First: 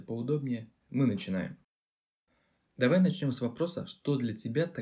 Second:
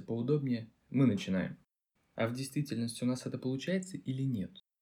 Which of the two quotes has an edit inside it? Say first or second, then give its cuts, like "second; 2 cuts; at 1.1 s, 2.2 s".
second; 1 cut; at 2.0 s